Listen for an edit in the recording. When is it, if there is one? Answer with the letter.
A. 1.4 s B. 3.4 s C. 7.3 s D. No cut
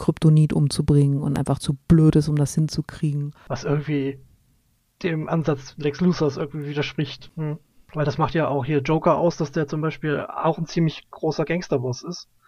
C